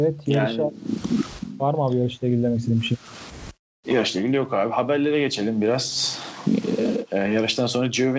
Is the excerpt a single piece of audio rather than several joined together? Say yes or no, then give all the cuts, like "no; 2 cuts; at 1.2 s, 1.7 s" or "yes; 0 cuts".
yes; 0 cuts